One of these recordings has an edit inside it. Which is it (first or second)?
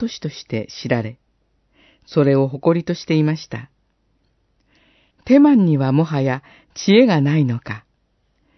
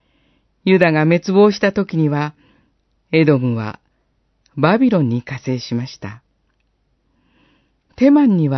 first